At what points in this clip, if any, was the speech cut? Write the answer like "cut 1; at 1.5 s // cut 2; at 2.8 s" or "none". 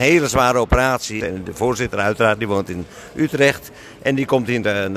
cut 1; at 1.2 s